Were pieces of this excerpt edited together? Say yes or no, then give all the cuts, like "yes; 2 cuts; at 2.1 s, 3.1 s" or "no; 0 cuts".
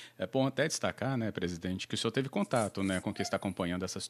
no; 0 cuts